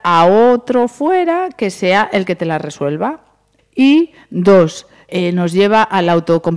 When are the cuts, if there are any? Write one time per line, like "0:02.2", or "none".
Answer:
0:03.6
0:05.1